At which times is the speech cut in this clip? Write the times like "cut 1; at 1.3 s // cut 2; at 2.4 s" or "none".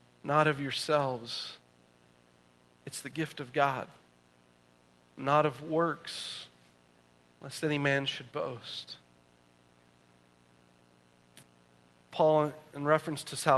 none

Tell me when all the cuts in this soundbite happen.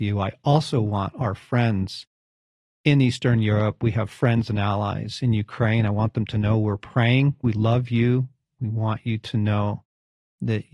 cut 1; at 7.4 s

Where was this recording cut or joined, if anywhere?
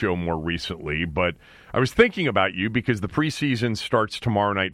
none

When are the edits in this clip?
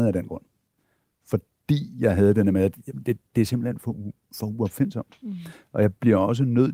none

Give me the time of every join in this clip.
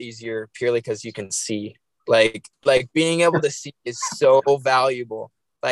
cut 1; at 2.5 s

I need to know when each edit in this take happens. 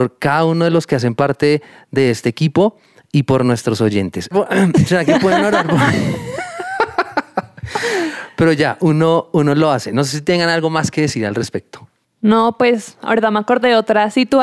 cut 1; at 4.3 s

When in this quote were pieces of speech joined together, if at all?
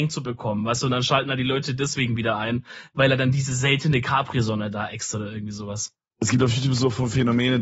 cut 1; at 6.1 s

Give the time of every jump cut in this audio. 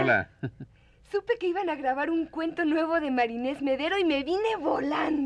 none

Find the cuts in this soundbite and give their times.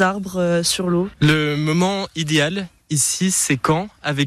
cut 1; at 1.1 s

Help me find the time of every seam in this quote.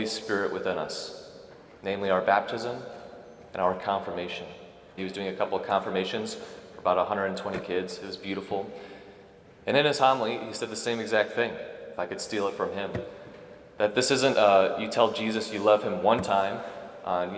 cut 1; at 5.0 s

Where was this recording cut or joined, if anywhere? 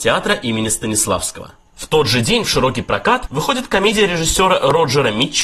cut 1; at 1.7 s

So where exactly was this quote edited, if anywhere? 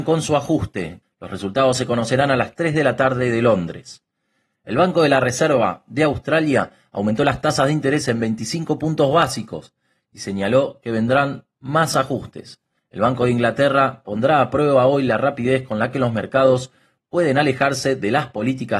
cut 1; at 1.0 s // cut 2; at 12.8 s

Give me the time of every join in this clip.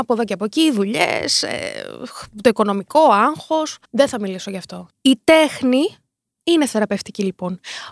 cut 1; at 3.8 s // cut 2; at 4.9 s

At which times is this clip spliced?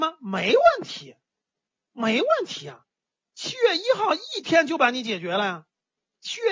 none

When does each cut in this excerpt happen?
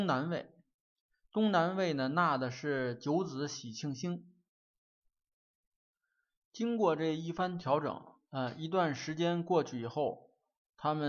none

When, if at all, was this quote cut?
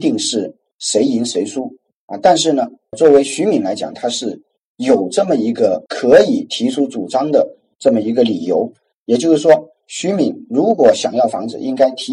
none

